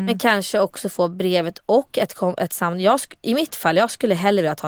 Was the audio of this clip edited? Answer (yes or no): no